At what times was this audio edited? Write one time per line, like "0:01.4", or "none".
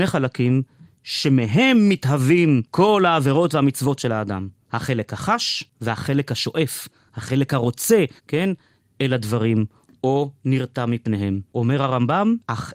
0:08.2
0:11.5